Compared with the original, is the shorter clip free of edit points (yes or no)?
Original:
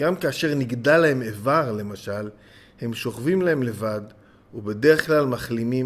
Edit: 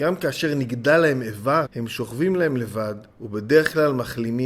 no